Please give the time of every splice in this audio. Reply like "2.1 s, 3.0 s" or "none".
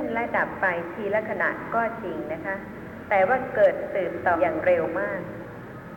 4.3 s